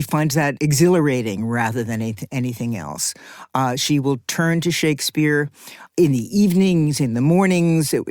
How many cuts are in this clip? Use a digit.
0